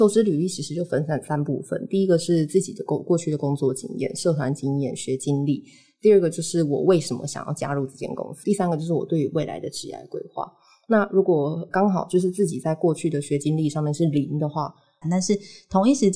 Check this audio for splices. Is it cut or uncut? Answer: cut